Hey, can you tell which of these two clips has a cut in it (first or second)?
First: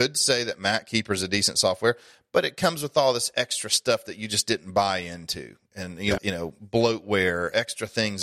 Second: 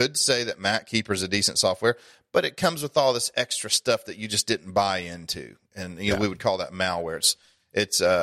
first